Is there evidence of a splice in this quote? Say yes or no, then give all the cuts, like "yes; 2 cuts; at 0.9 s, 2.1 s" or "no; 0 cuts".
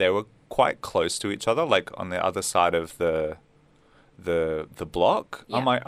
no; 0 cuts